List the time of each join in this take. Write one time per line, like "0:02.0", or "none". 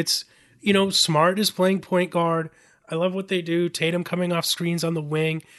none